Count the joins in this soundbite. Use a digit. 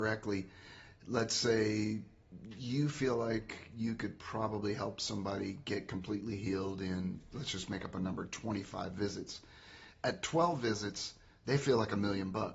0